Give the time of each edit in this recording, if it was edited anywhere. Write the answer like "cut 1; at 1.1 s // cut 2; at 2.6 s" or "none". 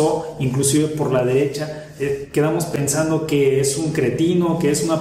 none